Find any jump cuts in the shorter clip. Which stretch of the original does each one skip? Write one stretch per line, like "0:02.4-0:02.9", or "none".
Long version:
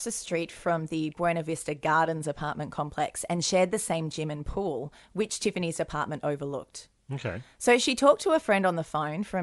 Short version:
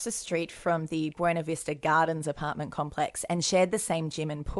none